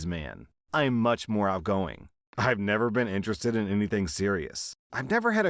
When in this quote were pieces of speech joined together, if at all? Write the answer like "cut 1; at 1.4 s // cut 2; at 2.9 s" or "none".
none